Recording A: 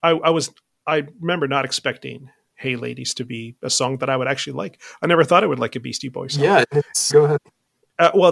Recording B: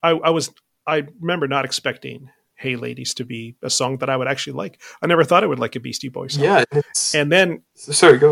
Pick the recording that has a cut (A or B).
A